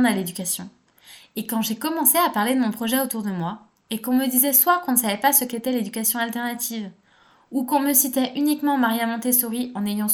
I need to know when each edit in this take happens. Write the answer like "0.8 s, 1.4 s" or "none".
none